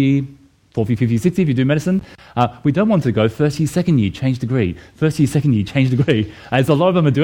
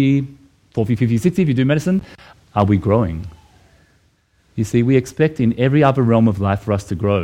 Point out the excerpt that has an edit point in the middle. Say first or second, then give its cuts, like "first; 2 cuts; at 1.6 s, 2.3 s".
second; 1 cut; at 2.3 s